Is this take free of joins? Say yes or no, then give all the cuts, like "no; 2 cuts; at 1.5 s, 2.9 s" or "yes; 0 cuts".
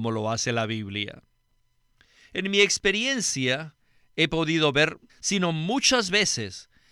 no; 1 cut; at 5.1 s